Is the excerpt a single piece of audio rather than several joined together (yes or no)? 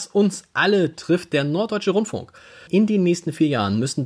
no